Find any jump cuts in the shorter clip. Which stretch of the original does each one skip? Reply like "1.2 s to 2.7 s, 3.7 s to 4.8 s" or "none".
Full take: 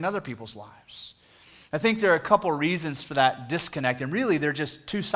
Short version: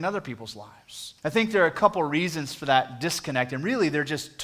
1.2 s to 1.7 s